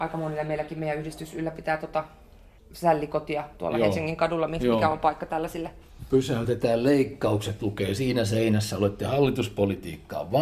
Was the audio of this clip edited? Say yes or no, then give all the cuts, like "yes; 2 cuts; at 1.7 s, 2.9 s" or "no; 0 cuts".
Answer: no; 0 cuts